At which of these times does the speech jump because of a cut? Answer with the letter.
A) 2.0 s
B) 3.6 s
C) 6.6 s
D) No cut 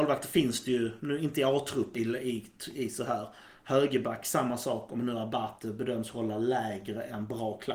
A